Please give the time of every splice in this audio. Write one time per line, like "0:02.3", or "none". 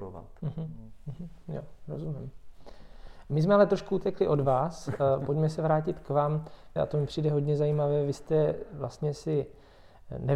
0:06.8